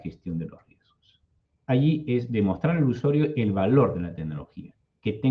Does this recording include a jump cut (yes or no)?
yes